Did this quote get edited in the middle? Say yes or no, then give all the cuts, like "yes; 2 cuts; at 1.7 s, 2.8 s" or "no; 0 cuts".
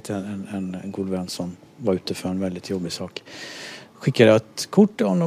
no; 0 cuts